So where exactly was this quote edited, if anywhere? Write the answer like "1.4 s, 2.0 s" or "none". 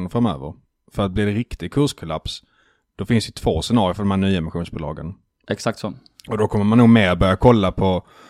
5.5 s